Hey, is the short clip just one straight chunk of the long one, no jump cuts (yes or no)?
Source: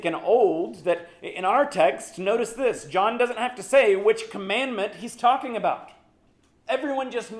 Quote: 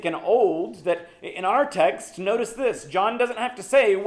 yes